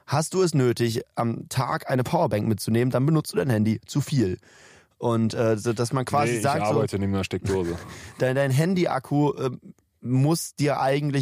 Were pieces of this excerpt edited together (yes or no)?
no